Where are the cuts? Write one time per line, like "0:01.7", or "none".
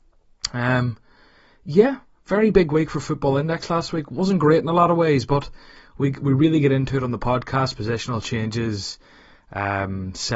none